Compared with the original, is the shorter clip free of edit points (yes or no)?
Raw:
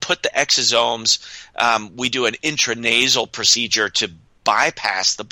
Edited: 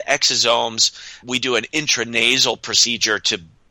no